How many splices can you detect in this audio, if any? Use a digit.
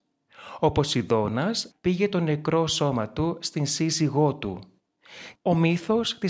2